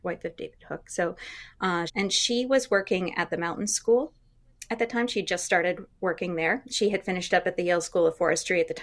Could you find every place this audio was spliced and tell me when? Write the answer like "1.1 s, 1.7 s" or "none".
1.9 s